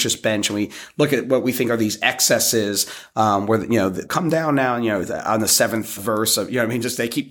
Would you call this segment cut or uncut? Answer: cut